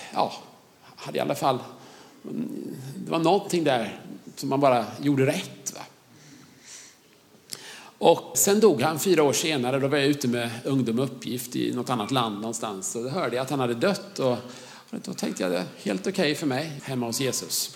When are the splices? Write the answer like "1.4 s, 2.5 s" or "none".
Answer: 8.3 s, 16.8 s